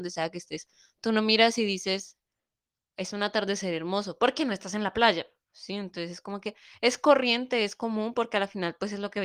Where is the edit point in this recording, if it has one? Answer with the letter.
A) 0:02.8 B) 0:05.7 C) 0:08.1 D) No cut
A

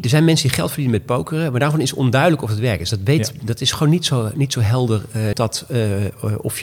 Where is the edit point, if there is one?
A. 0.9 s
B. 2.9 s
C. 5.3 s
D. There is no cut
C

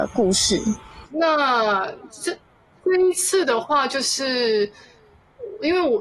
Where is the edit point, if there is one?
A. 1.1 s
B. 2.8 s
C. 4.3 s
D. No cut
A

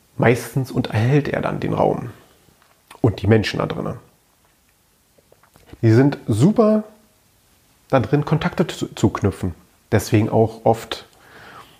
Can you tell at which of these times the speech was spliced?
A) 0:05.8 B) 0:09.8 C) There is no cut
A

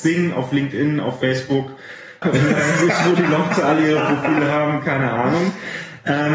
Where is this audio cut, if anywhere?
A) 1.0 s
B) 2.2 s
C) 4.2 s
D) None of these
B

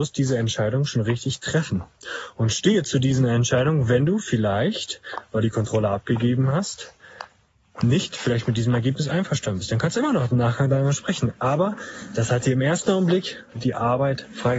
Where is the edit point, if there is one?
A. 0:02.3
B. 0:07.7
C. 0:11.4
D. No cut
D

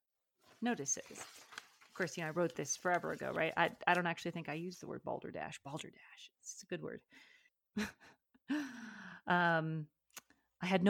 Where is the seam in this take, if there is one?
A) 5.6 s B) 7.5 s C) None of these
B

